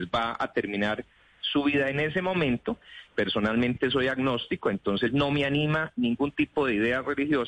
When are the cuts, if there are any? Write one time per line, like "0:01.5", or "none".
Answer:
0:03.1